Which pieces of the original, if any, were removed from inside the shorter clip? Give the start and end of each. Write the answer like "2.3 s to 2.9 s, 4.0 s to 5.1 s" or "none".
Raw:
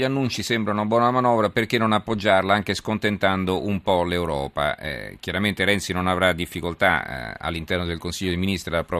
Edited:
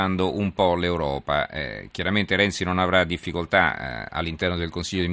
none